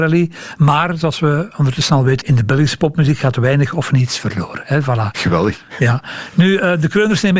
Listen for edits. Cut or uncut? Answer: cut